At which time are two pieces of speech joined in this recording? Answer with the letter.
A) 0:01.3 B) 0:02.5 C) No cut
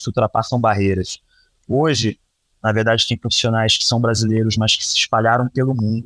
B